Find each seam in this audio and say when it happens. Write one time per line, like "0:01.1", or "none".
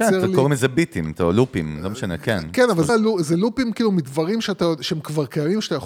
0:02.9